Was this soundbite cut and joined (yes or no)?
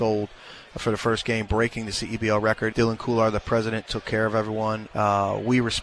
yes